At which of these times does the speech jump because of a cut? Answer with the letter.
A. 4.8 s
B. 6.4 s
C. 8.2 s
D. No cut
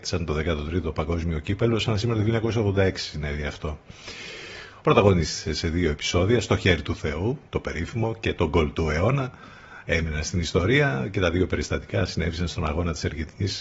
A